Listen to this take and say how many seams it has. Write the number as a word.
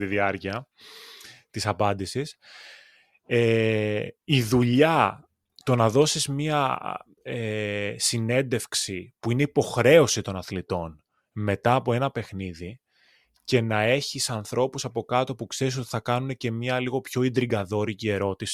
zero